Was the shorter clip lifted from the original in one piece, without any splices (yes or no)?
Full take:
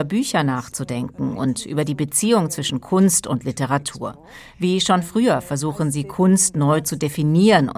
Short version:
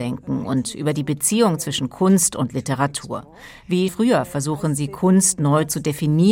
no